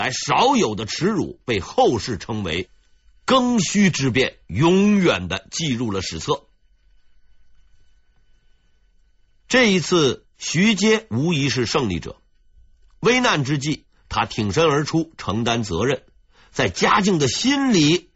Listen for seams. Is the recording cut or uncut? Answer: uncut